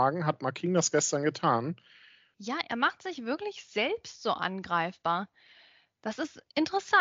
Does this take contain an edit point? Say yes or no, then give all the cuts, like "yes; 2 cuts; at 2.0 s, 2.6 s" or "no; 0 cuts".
yes; 1 cut; at 2.3 s